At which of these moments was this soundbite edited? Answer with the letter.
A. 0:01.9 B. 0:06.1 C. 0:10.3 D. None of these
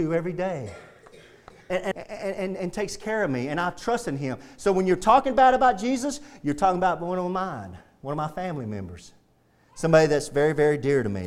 A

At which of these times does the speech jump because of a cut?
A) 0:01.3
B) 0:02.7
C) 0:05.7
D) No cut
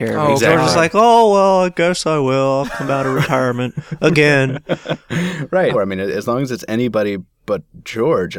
C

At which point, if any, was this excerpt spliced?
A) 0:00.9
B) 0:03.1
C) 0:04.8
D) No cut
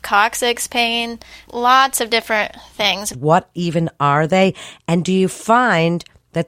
B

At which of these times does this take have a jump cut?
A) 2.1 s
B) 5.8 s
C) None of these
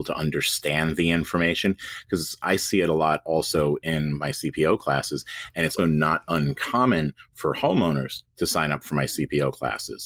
B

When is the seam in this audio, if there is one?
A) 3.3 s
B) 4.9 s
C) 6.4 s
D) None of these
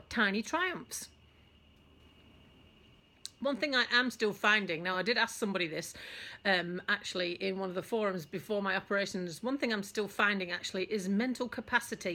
D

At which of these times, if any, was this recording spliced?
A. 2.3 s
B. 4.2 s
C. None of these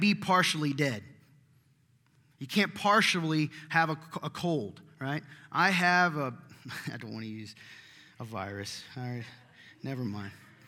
A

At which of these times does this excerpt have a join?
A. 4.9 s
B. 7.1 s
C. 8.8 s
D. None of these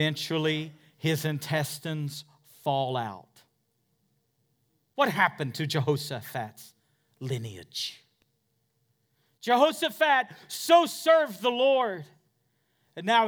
A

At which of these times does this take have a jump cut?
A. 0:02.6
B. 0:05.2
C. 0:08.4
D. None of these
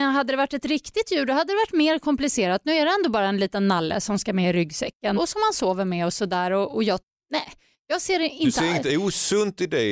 B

